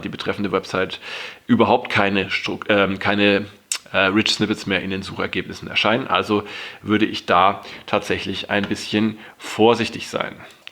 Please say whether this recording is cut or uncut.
uncut